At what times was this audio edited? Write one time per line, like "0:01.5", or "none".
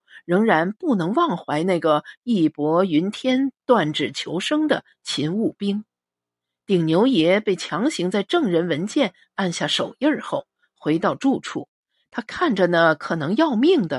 none